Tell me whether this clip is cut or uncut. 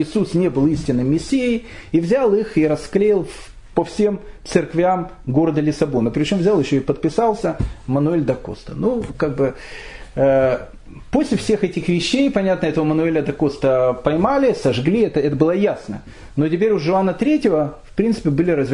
uncut